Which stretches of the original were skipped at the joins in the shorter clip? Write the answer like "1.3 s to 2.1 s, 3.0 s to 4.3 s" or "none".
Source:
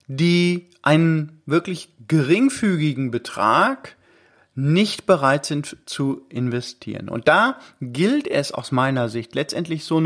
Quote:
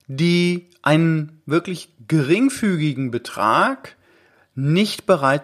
none